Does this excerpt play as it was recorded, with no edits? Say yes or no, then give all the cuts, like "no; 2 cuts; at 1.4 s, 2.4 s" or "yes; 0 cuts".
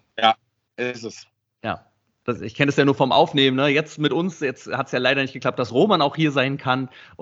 yes; 0 cuts